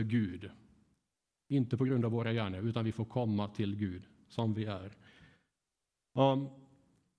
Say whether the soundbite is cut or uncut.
uncut